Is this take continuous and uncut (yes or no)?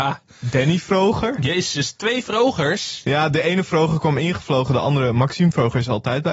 yes